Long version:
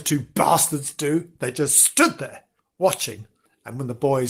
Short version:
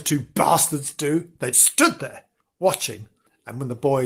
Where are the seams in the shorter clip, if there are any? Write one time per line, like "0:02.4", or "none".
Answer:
0:01.5